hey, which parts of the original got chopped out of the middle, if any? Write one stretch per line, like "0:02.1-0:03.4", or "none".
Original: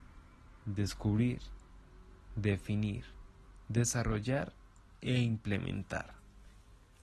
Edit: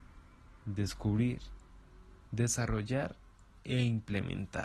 0:02.3-0:03.6